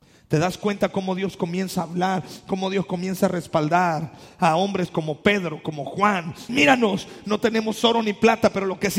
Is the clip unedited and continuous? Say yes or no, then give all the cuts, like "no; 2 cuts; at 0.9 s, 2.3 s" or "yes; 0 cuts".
no; 1 cut; at 6.5 s